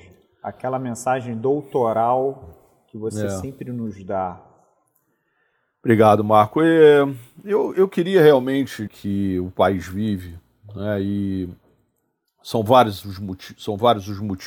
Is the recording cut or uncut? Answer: cut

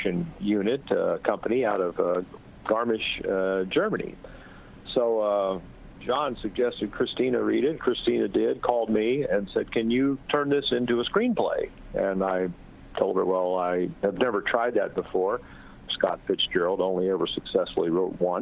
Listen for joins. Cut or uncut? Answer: cut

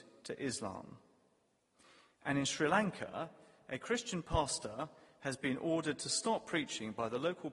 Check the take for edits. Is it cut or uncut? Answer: uncut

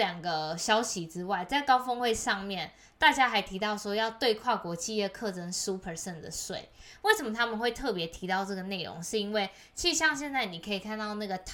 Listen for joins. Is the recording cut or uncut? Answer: uncut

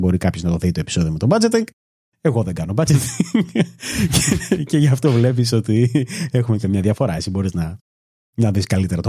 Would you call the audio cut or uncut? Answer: uncut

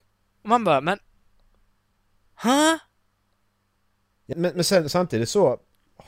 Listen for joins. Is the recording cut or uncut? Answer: cut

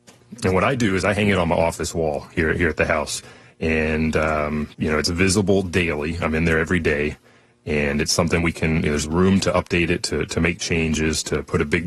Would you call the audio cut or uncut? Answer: cut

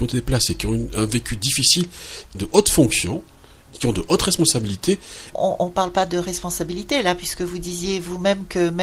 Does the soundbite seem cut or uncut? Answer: cut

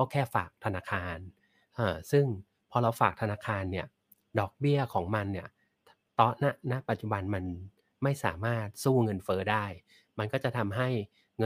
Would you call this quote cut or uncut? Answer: uncut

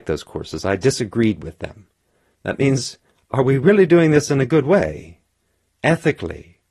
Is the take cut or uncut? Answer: cut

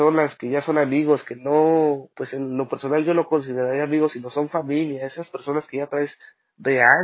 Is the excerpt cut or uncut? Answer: uncut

